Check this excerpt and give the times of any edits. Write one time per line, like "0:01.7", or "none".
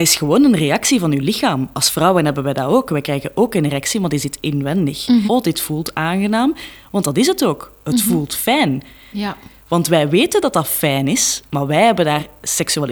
0:05.3
0:09.1